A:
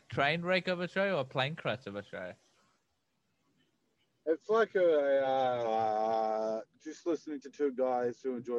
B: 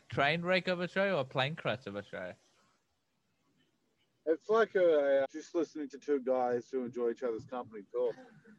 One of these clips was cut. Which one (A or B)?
B